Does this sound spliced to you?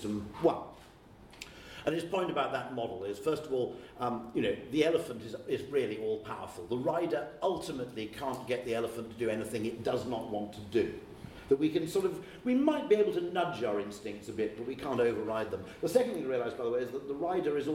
no; 0 cuts

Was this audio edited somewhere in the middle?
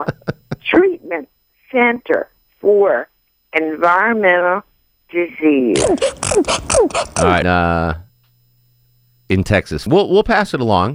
yes; 2 cuts; at 7.4 s, 9.9 s

